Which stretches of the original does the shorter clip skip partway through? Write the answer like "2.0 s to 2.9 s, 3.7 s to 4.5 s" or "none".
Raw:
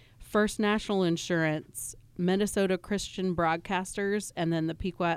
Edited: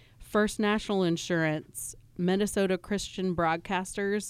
none